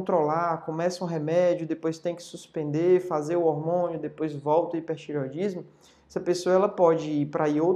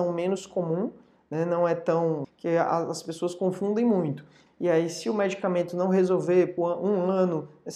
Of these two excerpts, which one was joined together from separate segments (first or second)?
second